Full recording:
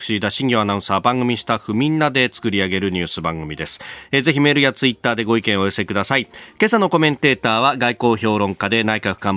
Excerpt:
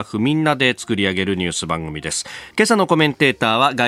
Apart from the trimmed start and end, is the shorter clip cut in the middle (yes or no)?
yes